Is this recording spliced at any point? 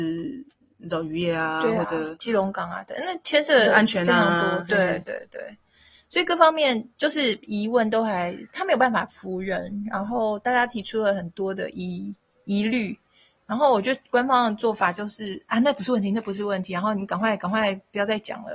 no; 0 cuts

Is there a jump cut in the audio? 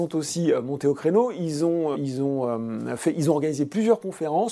yes; 1 cut; at 1.9 s

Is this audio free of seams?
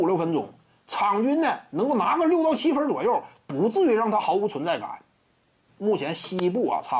no; 1 cut; at 5.7 s

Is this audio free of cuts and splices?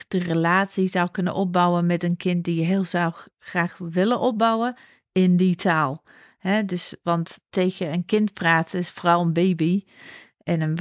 yes; 0 cuts

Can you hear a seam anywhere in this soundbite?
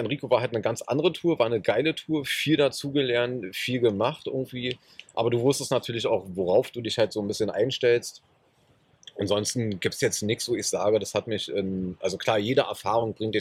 no; 0 cuts

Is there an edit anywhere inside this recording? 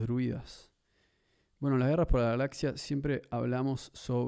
no; 0 cuts

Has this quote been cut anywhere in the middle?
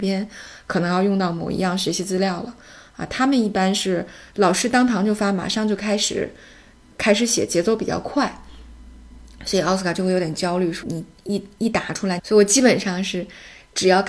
yes; 2 cuts; at 10.8 s, 12.2 s

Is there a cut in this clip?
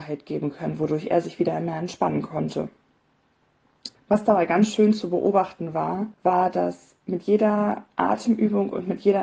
yes; 2 cuts; at 3.9 s, 6.1 s

